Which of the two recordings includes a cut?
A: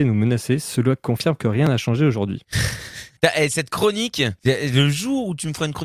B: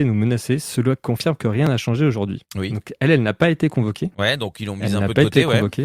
B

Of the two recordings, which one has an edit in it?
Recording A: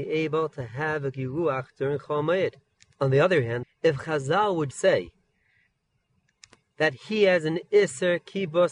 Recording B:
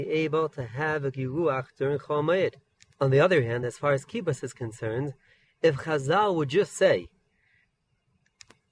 A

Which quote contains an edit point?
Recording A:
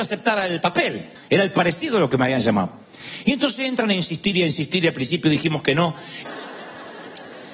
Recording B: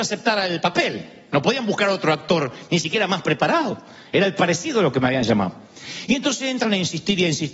A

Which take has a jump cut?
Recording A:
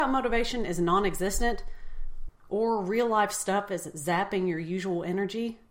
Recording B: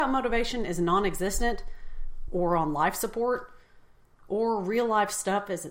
A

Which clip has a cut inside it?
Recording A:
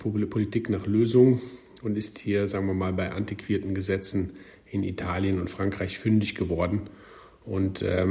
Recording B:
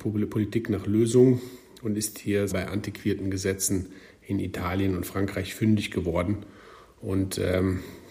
B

